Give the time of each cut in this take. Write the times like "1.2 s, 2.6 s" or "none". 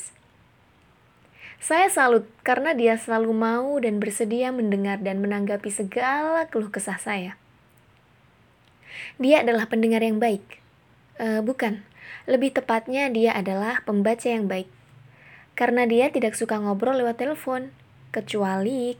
none